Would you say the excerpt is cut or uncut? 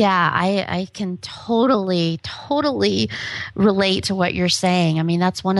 uncut